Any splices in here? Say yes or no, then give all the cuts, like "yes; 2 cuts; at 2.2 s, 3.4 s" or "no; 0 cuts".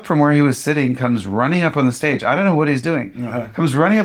no; 0 cuts